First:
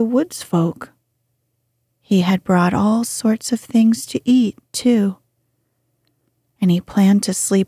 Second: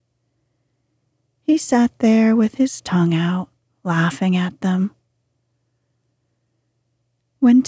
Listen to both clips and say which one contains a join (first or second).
first